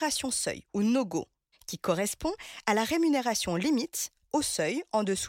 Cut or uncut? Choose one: cut